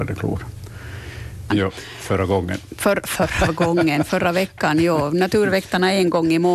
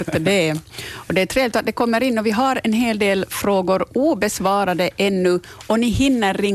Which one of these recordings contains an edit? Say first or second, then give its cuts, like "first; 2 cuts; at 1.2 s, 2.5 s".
first; 1 cut; at 1.5 s